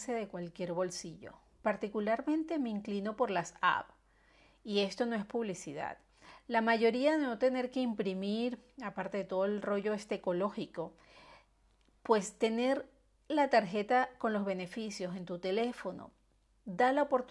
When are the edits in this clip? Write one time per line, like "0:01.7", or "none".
none